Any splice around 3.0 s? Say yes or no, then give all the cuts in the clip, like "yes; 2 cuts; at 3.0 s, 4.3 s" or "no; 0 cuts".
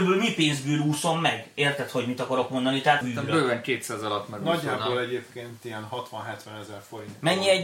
yes; 1 cut; at 3.0 s